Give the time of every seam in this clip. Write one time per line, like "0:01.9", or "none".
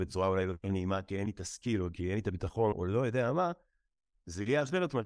0:02.7